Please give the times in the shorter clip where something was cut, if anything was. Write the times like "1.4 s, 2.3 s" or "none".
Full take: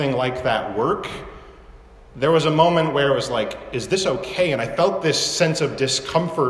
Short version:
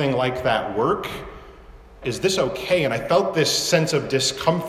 2.0 s